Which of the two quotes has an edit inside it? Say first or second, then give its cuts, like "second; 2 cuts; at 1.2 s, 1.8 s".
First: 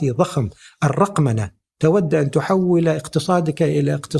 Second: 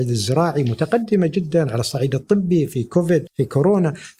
second; 1 cut; at 3.3 s